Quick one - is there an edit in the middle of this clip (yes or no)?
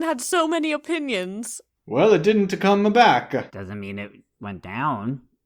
yes